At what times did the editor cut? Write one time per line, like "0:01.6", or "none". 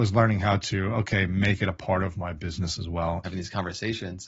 0:03.2